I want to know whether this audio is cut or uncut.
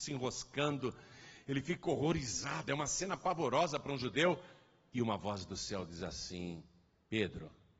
uncut